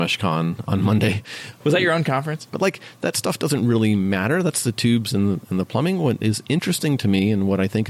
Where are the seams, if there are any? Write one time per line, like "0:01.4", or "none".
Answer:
0:02.5